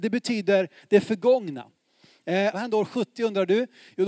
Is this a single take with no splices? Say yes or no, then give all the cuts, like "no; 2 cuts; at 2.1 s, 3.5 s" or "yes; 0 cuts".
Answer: no; 1 cut; at 2.5 s